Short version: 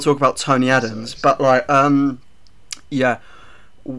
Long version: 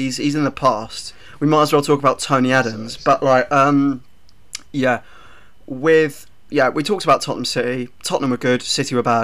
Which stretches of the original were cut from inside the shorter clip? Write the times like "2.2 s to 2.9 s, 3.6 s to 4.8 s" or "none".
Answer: none